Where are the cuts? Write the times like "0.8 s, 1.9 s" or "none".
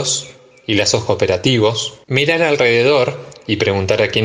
2.0 s